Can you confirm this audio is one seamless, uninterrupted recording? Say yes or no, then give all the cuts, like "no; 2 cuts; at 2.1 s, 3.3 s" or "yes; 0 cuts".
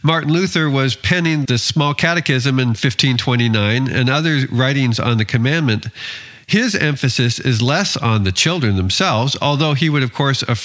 no; 1 cut; at 1.4 s